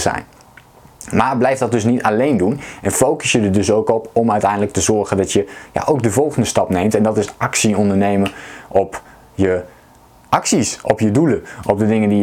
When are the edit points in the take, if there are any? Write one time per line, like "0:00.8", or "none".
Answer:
none